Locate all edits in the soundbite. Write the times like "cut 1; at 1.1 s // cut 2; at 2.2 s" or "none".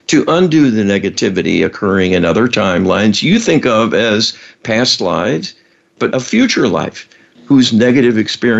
cut 1; at 6.1 s